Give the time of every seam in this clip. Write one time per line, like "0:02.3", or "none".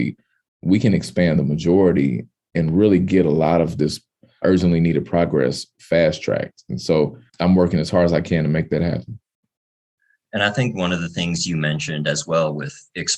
0:04.4
0:07.3